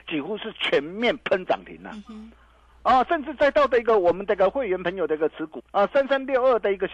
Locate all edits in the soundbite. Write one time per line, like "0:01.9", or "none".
0:05.6